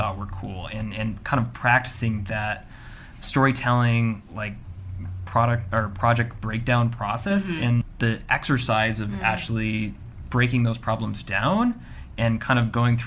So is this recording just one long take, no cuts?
yes; 0 cuts

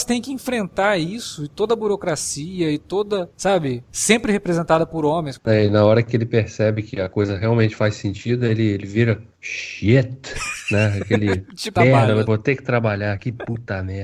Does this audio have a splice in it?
yes; 2 cuts; at 5.4 s, 11.8 s

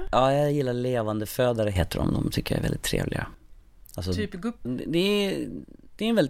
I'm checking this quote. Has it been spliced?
yes; 1 cut; at 4.7 s

